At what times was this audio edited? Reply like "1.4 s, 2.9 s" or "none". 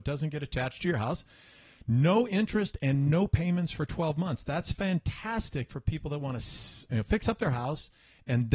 none